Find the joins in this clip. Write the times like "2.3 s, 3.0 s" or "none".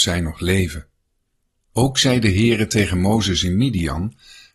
1.7 s